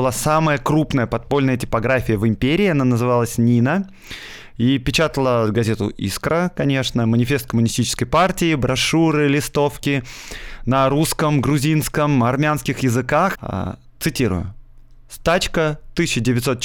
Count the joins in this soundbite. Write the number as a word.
one